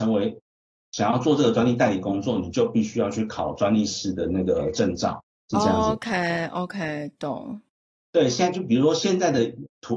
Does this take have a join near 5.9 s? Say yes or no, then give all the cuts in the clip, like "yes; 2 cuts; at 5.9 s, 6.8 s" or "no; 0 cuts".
no; 0 cuts